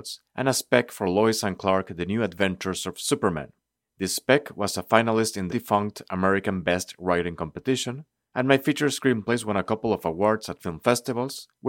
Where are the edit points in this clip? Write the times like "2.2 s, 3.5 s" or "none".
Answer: 5.5 s

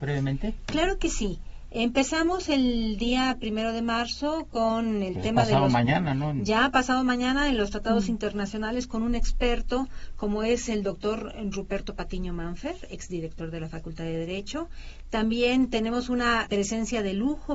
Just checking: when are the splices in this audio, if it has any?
16.5 s

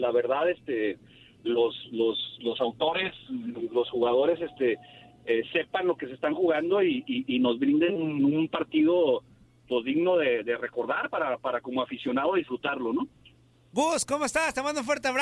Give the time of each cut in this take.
none

